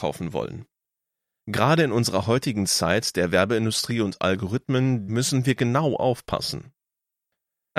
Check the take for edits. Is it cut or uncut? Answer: cut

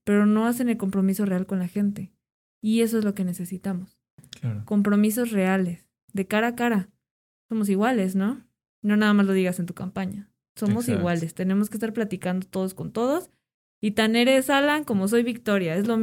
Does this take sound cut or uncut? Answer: uncut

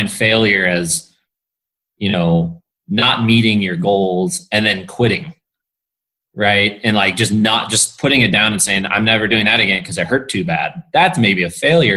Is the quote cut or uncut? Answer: uncut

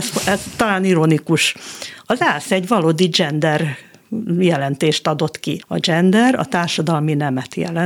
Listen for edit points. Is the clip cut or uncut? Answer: cut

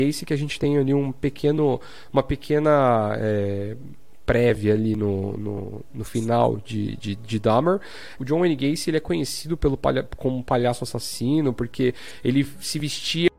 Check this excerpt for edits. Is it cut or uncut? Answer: cut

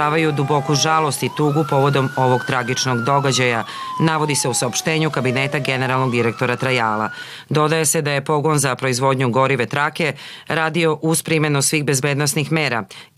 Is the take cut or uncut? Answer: uncut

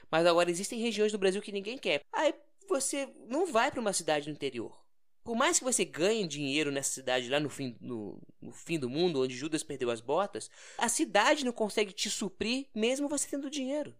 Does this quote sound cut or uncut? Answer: cut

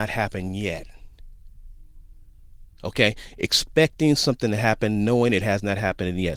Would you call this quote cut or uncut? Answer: cut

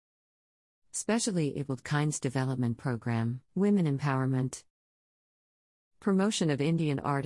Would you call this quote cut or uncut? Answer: cut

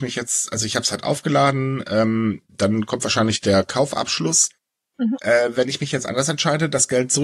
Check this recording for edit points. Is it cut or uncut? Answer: uncut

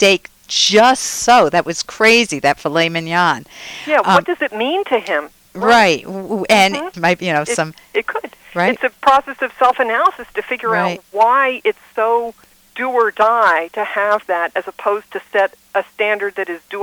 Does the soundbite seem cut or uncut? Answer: cut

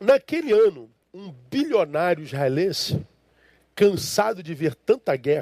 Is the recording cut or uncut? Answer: uncut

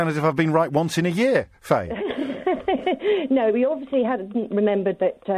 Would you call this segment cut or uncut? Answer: uncut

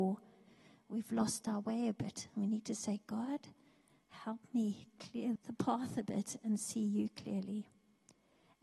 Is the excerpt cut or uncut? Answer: cut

